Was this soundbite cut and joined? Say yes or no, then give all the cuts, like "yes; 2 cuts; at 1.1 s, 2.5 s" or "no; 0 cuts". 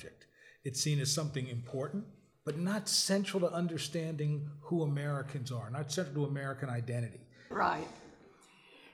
yes; 2 cuts; at 2.3 s, 7.5 s